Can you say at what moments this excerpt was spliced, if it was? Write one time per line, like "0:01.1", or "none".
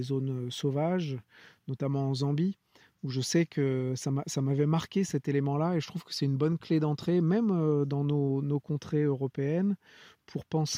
none